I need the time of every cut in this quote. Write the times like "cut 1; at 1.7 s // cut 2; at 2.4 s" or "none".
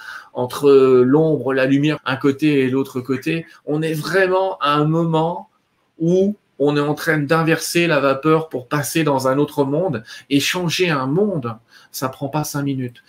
cut 1; at 2.0 s